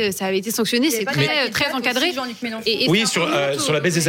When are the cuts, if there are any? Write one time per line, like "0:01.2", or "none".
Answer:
none